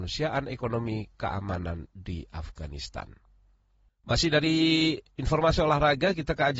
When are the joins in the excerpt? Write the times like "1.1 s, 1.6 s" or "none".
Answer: 3.9 s, 5.1 s